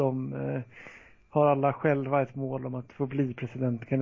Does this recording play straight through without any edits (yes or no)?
yes